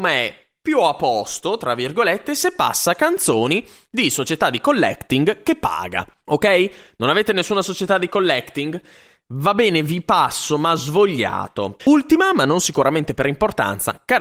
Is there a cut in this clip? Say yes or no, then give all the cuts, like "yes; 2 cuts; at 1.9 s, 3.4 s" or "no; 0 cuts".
yes; 1 cut; at 11.8 s